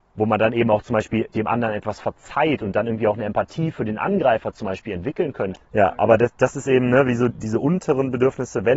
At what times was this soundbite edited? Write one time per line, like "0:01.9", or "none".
0:05.6
0:07.3